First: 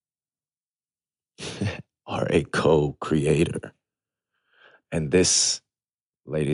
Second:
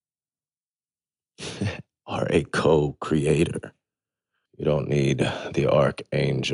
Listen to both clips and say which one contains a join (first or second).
second